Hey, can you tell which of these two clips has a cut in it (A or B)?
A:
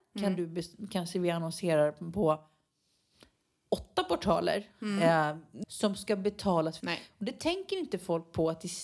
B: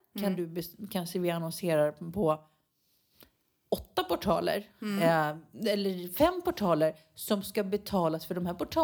A